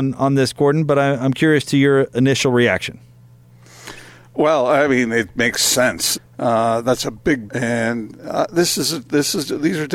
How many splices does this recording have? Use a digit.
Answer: 2